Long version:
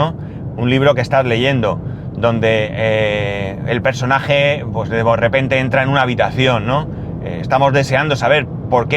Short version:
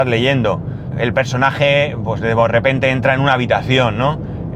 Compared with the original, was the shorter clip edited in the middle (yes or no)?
yes